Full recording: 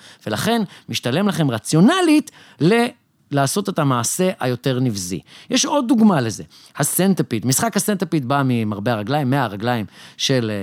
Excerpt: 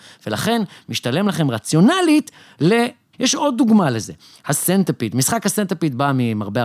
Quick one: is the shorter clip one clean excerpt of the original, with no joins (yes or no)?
no